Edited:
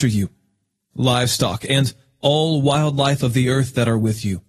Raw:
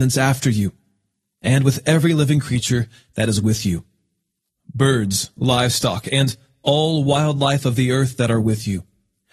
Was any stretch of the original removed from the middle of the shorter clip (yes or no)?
yes